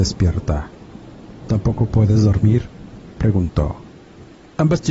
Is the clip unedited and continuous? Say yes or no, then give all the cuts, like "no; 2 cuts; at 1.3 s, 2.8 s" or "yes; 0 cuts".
yes; 0 cuts